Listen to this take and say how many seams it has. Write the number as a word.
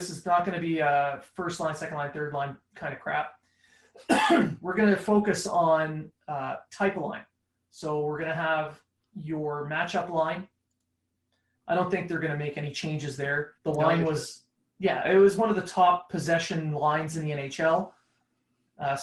two